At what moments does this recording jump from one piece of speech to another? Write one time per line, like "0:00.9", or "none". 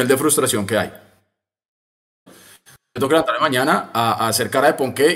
0:02.3